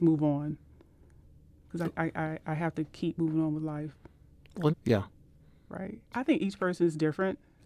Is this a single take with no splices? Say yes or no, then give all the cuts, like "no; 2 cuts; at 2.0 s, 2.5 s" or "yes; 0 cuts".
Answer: no; 2 cuts; at 4.7 s, 6.1 s